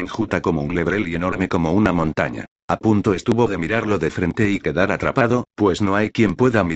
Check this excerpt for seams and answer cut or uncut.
cut